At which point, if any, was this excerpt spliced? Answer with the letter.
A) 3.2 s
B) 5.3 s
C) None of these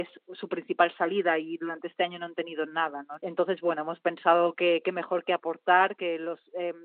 A